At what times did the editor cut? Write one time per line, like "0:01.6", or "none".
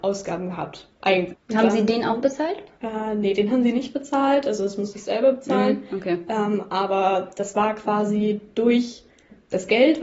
0:01.3